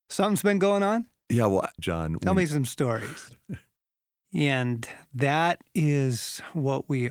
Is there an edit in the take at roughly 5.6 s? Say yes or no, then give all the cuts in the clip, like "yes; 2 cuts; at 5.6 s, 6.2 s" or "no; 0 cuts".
no; 2 cuts; at 1.8 s, 4.2 s